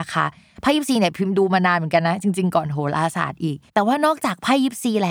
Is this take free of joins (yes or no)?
no